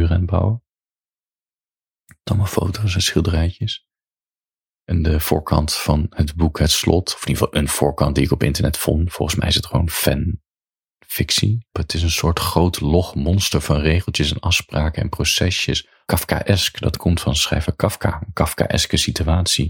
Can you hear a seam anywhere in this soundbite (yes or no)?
yes